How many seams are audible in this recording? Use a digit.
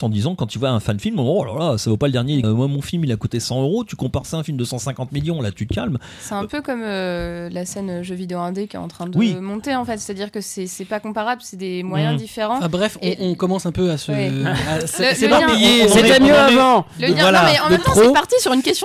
1